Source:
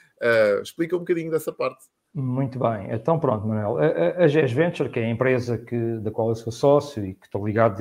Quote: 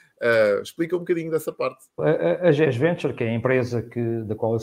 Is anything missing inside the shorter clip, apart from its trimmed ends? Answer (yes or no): yes